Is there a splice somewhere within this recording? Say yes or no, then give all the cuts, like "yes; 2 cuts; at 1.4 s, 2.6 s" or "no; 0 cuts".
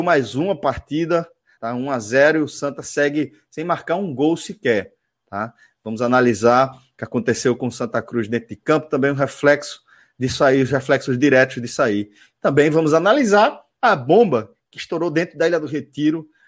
yes; 1 cut; at 1.6 s